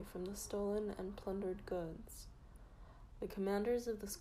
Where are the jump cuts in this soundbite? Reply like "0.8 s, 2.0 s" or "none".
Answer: 3.1 s